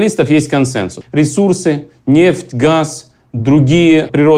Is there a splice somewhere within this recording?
yes; 1 cut; at 1.0 s

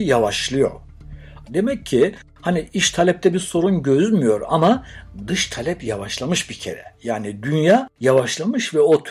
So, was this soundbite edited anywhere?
yes; 1 cut; at 1.4 s

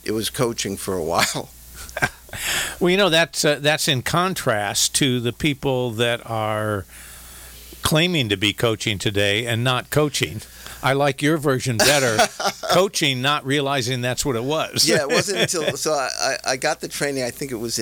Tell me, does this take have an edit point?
no; 0 cuts

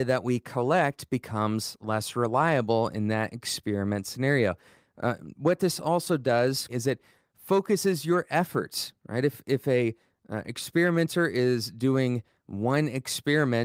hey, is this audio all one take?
no; 1 cut; at 6.7 s

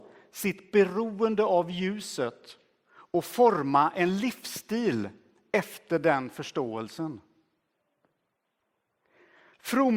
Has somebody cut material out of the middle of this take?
no; 0 cuts

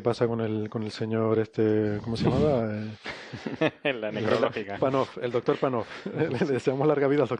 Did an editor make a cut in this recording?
yes; 1 cut; at 4.8 s

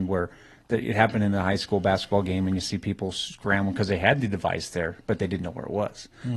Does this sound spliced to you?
no; 0 cuts

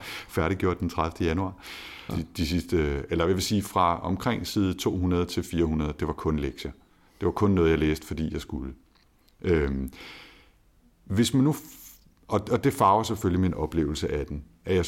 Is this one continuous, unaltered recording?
no; 1 cut; at 2.1 s

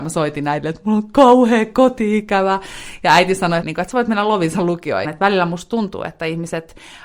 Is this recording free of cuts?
no; 2 cuts; at 3.6 s, 5.0 s

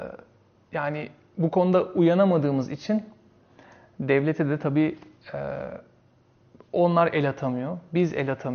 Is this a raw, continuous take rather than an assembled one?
yes; 0 cuts

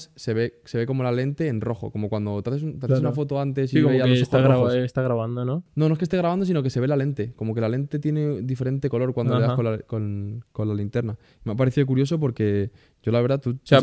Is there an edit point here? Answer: no; 0 cuts

